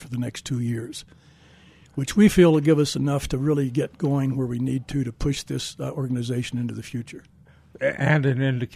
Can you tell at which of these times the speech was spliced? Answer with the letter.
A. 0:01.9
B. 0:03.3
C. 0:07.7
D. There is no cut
C